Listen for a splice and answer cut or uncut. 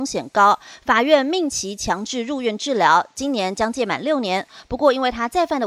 uncut